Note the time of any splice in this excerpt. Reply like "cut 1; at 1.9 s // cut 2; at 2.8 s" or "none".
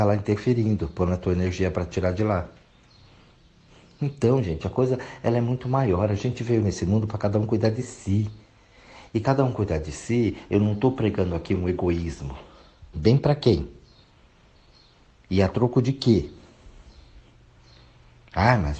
cut 1; at 12.9 s